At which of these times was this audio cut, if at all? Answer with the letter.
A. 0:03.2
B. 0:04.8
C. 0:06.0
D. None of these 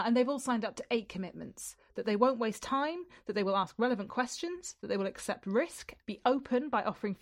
C